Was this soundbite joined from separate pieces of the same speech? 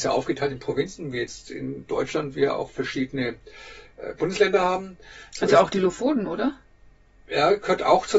no; 0 cuts

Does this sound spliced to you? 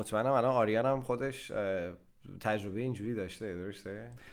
no; 0 cuts

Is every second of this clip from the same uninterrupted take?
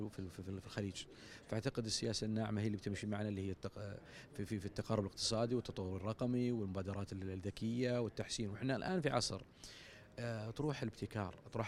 yes; 0 cuts

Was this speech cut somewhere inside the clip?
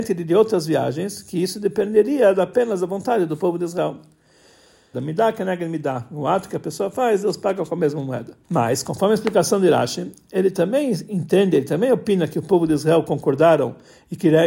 yes; 2 cuts; at 4.9 s, 8.4 s

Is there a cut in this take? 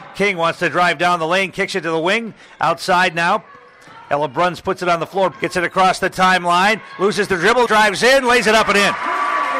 yes; 2 cuts; at 5.3 s, 7.7 s

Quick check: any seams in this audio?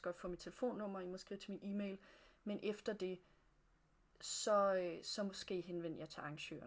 no; 0 cuts

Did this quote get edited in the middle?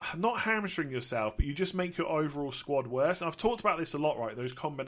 no; 0 cuts

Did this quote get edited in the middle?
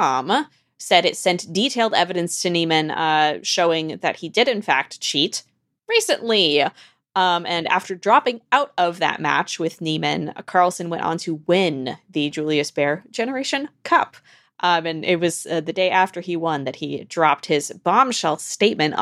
no; 0 cuts

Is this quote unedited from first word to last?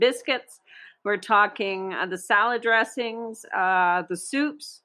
yes; 0 cuts

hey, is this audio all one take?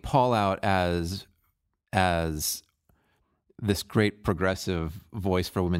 yes; 0 cuts

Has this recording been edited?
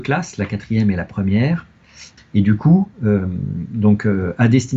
yes; 1 cut; at 2.2 s

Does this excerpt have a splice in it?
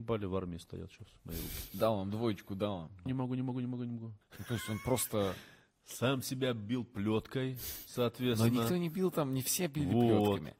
yes; 2 cuts; at 3.1 s, 4.2 s

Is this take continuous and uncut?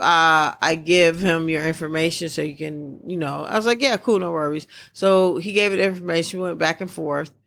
yes; 0 cuts

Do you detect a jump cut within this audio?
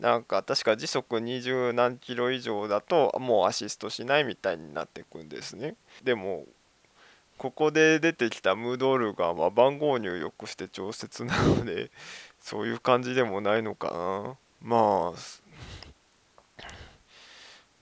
yes; 1 cut; at 6.0 s

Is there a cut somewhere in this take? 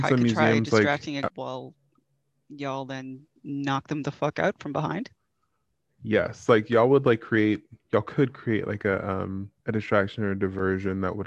yes; 2 cuts; at 1.3 s, 9.6 s

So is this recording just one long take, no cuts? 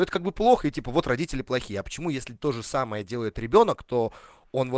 yes; 0 cuts

